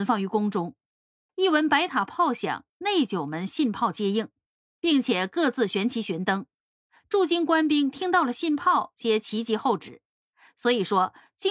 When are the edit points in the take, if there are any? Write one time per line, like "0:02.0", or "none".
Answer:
0:01.3